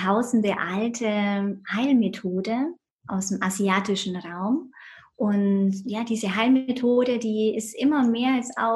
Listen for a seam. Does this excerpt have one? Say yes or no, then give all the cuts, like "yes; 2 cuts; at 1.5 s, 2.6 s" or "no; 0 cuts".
no; 0 cuts